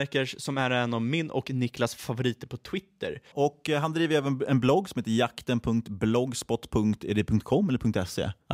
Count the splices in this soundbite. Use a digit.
1